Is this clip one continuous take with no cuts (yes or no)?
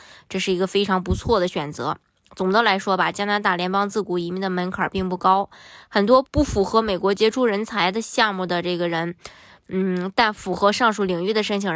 no